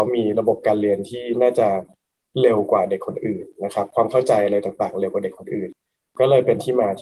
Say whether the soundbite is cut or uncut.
uncut